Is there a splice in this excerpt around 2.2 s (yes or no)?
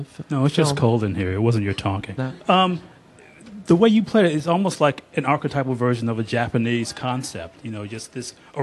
yes